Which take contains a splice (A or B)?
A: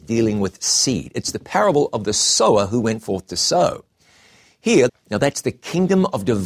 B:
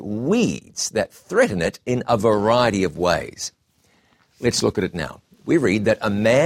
A